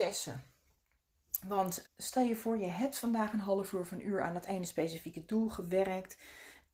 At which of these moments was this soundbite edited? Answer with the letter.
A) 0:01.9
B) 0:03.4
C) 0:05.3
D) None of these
A